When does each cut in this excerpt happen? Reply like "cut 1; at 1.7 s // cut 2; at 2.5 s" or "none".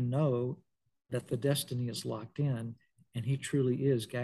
none